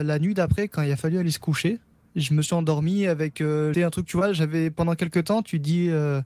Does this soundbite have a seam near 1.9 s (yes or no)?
no